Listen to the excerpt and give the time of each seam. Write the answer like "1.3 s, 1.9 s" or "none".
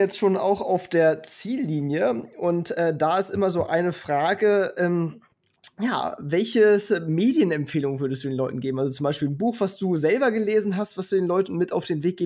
none